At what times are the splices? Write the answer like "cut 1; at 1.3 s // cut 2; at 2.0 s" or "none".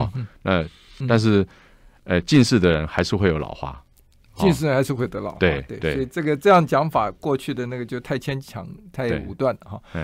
cut 1; at 1.0 s